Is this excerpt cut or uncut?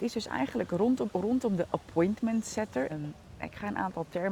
cut